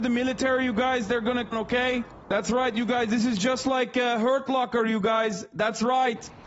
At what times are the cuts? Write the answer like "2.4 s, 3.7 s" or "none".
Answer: 1.5 s